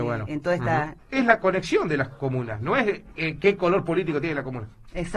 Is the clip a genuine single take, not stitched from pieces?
no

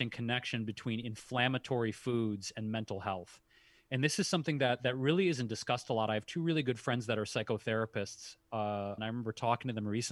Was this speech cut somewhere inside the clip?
yes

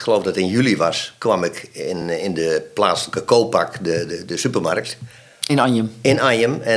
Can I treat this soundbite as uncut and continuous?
yes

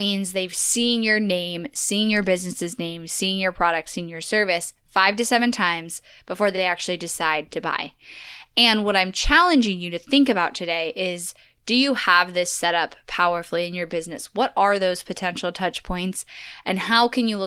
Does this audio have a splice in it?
no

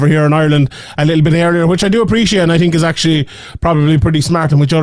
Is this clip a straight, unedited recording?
yes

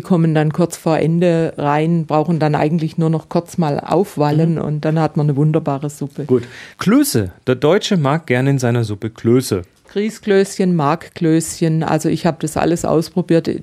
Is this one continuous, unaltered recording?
no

